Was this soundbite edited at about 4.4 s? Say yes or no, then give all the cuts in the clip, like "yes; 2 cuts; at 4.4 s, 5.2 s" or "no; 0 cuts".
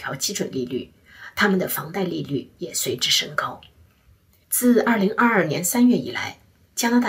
yes; 1 cut; at 4.4 s